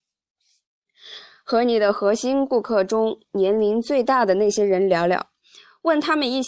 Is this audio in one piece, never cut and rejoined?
yes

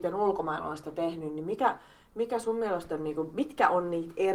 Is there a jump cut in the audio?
no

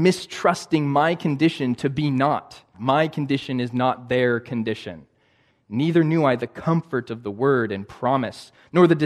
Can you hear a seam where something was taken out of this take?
yes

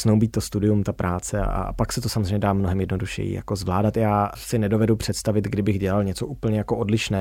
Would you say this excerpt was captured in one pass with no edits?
yes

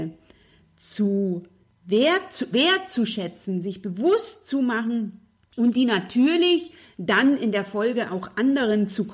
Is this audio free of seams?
no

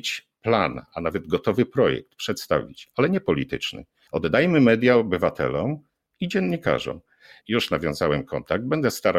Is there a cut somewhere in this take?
yes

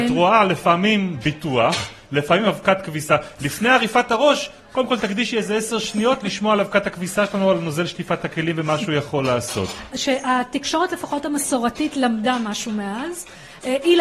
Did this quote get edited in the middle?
yes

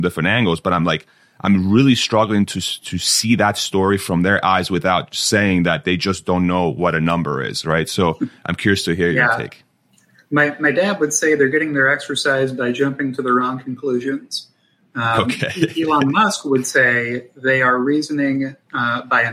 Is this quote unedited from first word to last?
yes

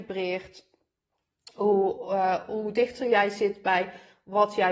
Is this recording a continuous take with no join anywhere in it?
yes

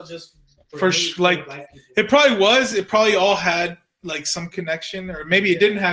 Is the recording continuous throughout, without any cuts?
yes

